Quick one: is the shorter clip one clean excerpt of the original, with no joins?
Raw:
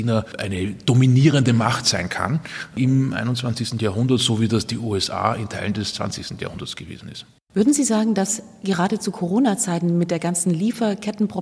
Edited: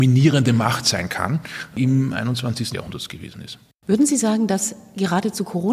no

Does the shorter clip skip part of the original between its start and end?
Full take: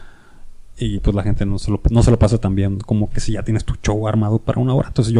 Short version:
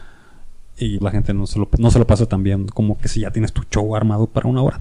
yes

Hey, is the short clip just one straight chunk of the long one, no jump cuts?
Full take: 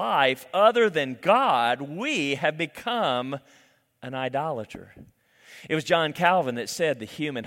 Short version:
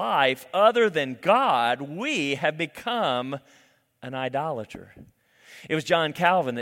yes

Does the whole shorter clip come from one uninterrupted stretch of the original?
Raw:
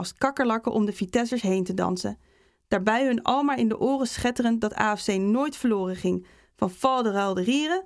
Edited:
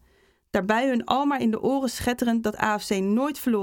yes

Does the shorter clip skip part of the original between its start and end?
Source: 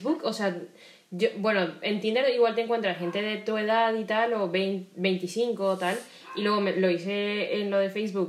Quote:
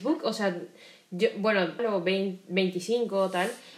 yes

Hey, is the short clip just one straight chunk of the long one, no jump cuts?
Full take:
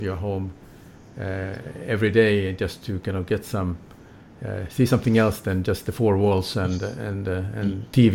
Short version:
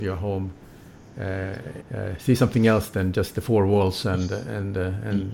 no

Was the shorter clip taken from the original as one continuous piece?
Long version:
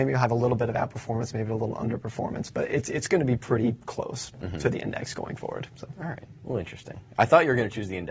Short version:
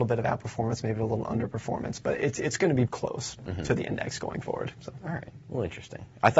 no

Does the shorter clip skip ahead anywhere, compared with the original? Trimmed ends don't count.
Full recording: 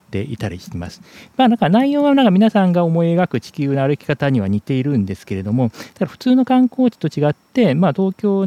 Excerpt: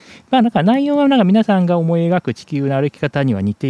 no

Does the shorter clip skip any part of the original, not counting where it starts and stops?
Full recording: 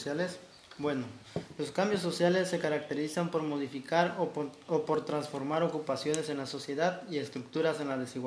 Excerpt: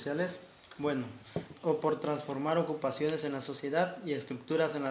yes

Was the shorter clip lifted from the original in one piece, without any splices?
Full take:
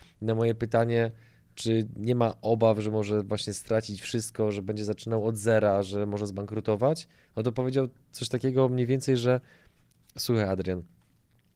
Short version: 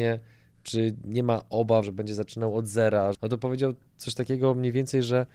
no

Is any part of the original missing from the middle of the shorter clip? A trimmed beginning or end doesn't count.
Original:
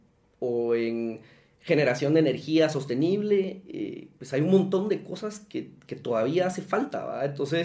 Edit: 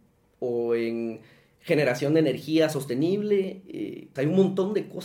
yes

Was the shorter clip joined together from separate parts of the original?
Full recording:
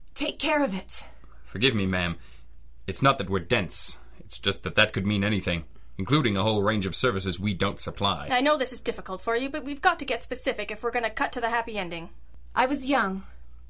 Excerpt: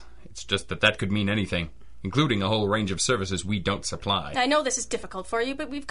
no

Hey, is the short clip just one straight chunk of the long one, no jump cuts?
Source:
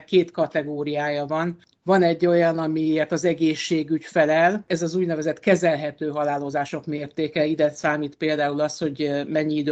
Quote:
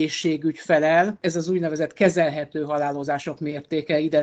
yes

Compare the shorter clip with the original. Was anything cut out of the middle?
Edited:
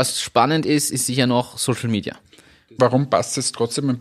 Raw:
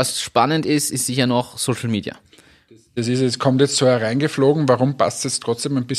yes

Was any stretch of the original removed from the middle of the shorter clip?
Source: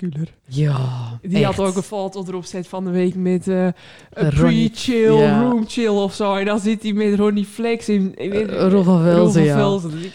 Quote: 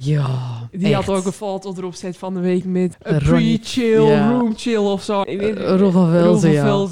yes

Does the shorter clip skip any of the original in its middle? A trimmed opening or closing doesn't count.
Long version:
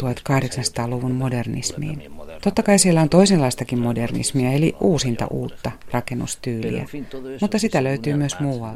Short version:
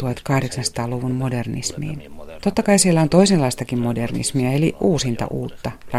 no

